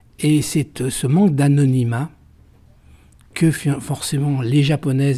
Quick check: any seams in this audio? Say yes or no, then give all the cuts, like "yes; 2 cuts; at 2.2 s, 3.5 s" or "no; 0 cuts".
no; 0 cuts